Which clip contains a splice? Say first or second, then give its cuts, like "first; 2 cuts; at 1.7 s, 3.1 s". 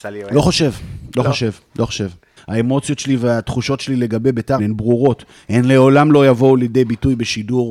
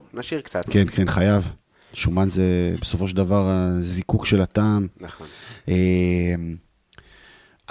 first; 2 cuts; at 2.4 s, 4.6 s